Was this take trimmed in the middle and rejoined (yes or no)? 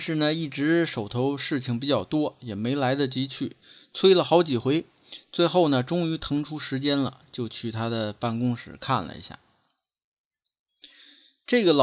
no